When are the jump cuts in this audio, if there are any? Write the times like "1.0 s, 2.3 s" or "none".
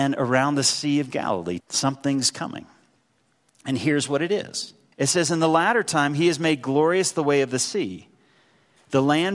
1.6 s, 4.9 s